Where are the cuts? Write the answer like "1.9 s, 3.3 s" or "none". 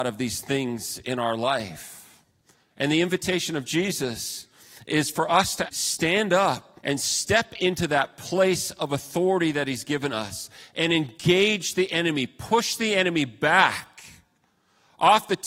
2.7 s, 5.7 s, 6.8 s